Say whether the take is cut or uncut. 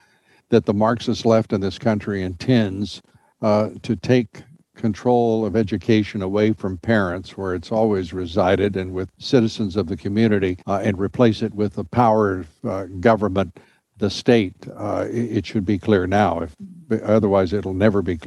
cut